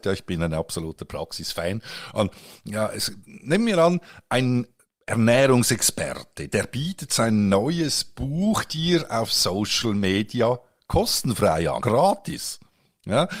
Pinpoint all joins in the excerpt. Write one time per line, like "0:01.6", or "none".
0:03.2
0:11.8